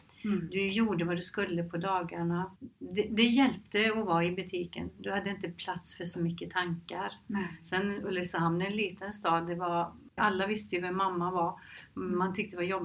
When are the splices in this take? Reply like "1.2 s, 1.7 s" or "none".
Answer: 10.2 s